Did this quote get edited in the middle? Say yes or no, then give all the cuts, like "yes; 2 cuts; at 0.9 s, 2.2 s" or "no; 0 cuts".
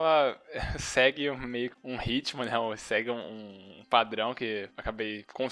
no; 0 cuts